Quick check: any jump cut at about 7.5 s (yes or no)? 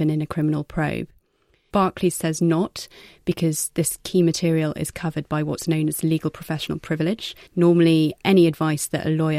yes